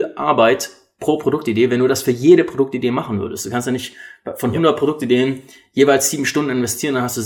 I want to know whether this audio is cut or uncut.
uncut